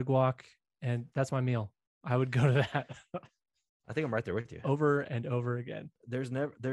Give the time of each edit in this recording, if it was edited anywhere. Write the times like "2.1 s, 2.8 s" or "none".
1.1 s